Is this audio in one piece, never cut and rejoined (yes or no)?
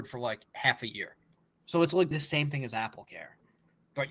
no